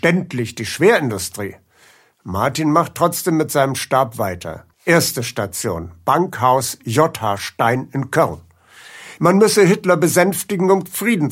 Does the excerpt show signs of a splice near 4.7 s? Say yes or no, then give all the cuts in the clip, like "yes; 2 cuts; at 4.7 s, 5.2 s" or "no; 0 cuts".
yes; 2 cuts; at 4.7 s, 9.2 s